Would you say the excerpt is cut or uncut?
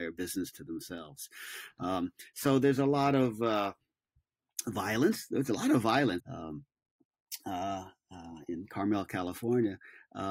cut